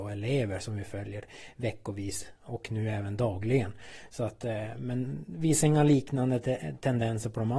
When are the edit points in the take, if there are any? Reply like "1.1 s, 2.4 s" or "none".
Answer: none